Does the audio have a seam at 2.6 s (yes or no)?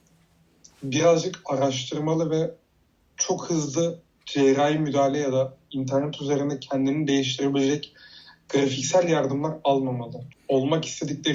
no